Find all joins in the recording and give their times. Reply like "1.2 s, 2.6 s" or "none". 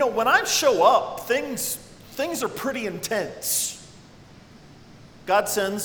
none

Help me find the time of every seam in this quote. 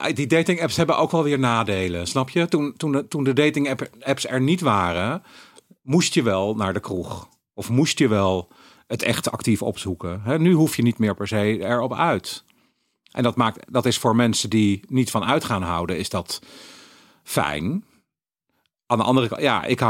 none

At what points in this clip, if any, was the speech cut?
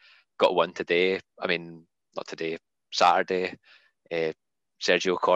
none

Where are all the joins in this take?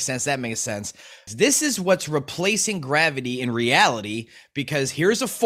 1.3 s

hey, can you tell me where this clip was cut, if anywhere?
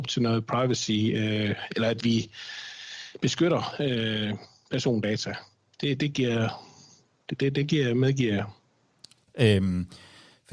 9.3 s

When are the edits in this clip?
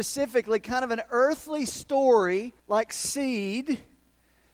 2.6 s

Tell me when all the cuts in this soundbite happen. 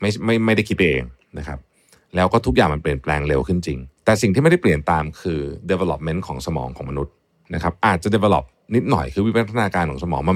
4.0 s

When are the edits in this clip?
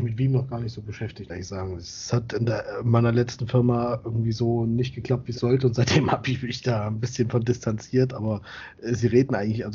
5.3 s

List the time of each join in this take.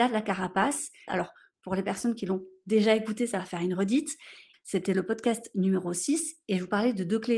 1.1 s, 4.5 s

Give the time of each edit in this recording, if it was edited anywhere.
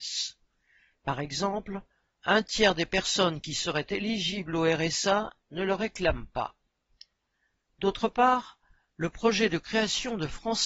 none

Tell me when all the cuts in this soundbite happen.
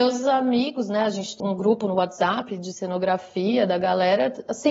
1.4 s

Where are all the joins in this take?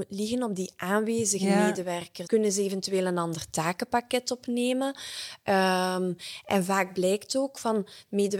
2.2 s

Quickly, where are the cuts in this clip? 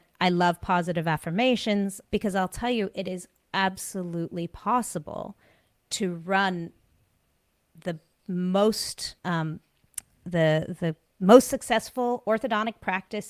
2.0 s, 9.2 s

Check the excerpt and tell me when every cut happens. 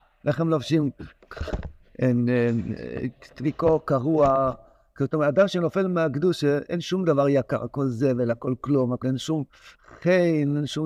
9.0 s

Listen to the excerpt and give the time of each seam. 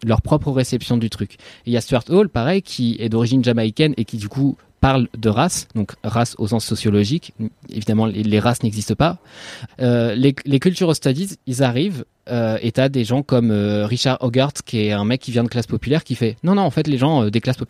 9.7 s

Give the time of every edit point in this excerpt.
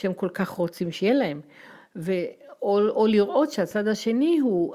none

